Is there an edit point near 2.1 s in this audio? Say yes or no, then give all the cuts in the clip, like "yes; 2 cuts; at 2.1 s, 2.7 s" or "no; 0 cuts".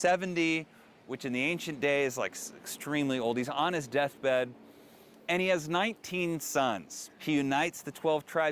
no; 1 cut; at 7.2 s